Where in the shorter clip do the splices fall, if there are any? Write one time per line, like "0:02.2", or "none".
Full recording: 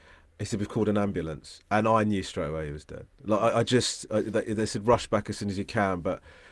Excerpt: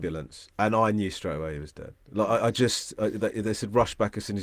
none